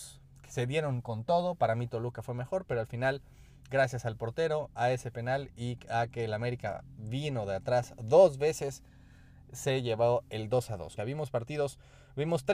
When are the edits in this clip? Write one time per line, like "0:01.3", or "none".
0:11.0